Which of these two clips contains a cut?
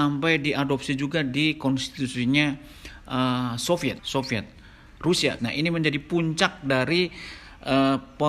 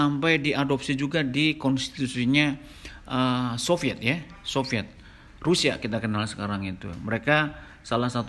first; 2 cuts; at 4.0 s, 5.4 s

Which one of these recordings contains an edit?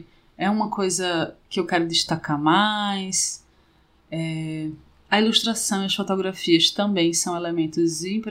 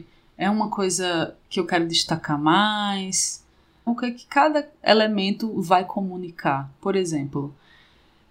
second; 1 cut; at 3.9 s

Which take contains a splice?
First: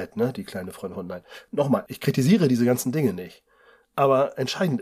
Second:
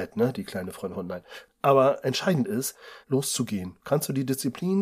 second; 2 cuts; at 1.5 s, 3.0 s

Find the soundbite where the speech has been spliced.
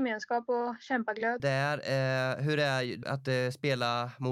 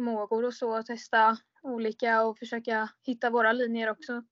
first; 2 cuts; at 1.4 s, 3.0 s

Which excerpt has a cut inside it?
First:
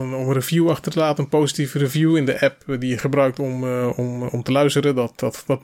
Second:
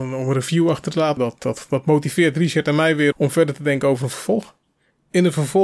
second; 2 cuts; at 1.2 s, 3.1 s

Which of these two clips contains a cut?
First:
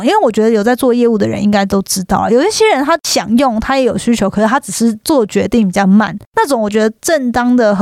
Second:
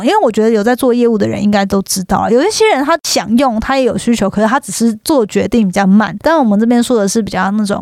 second; 1 cut; at 6.2 s

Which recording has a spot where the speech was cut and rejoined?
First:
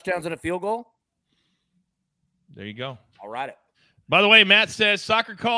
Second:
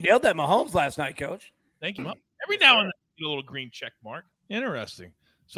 second; 2 cuts; at 2.0 s, 4.3 s

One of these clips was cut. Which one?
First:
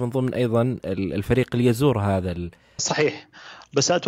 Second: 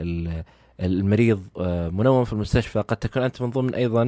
first; 1 cut; at 2.8 s

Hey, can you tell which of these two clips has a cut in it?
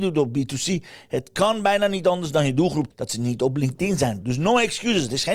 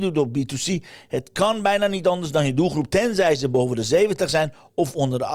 first; 2 cuts; at 2.9 s, 4.2 s

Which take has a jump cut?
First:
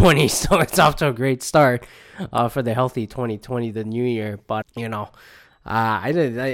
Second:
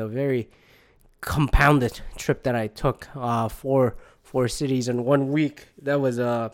first; 1 cut; at 4.6 s

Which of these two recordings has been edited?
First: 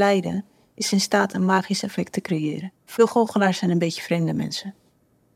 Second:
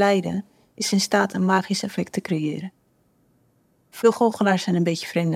first; 1 cut; at 2.8 s

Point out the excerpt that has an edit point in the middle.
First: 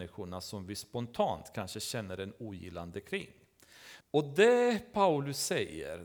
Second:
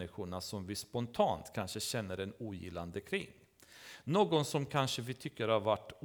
first; 1 cut; at 4.0 s

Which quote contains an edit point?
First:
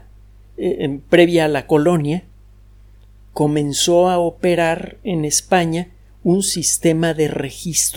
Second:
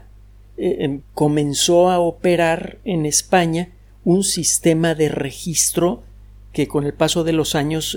second; 1 cut; at 1.0 s

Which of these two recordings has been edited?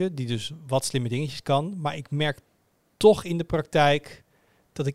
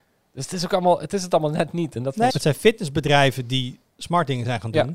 second; 1 cut; at 2.3 s

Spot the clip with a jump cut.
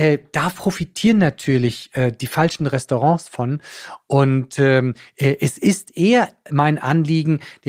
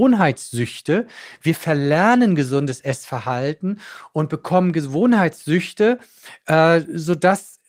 first; 1 cut; at 6.5 s

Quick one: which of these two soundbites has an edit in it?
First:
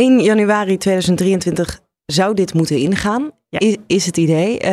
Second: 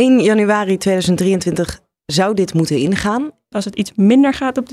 second; 1 cut; at 3.5 s

